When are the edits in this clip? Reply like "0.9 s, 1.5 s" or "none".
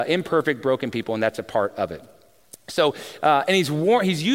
none